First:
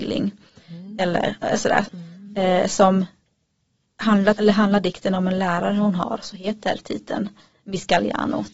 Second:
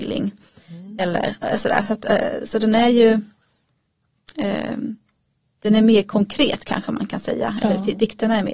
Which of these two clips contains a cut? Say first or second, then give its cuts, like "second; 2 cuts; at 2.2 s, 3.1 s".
first; 2 cuts; at 1.8 s, 4.4 s